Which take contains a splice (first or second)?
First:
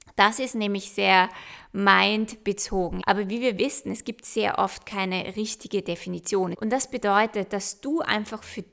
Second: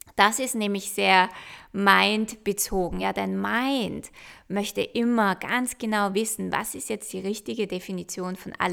first